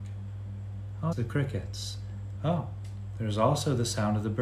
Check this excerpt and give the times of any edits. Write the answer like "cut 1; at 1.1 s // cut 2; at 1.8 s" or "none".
cut 1; at 1.1 s // cut 2; at 2.4 s